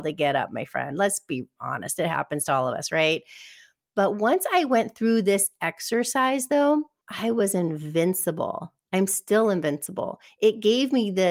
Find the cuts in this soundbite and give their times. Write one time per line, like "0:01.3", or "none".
none